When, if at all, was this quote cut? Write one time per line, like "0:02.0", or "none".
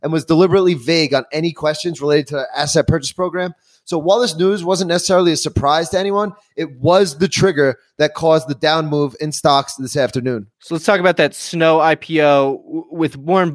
0:10.5